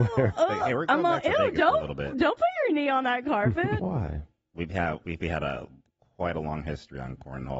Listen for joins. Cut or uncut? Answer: cut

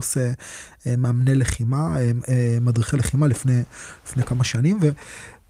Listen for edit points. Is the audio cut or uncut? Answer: uncut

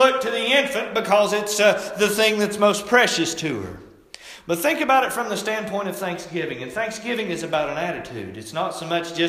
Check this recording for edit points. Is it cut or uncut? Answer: uncut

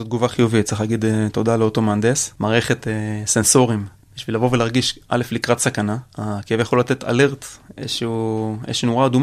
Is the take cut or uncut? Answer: uncut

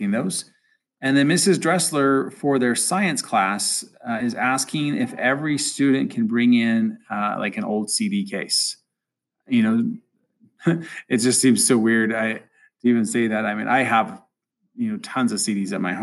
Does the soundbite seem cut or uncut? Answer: uncut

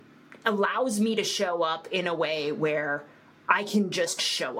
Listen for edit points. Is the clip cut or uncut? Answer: uncut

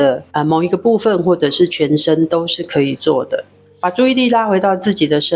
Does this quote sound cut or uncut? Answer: uncut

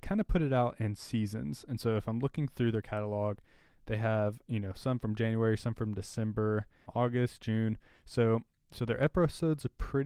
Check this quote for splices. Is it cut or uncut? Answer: cut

